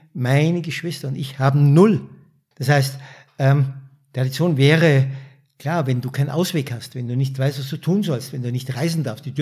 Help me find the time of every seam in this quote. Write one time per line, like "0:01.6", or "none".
0:02.5